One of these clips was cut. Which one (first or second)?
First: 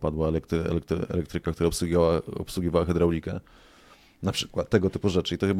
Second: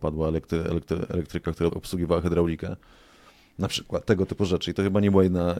second